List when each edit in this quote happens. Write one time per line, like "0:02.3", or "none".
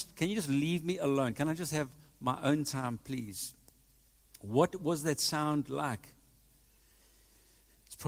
none